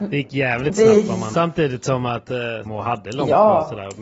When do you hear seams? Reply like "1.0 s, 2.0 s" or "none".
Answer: 1.3 s, 2.7 s